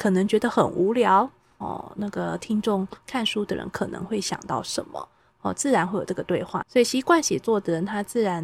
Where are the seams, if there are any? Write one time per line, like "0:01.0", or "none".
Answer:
0:01.6
0:06.6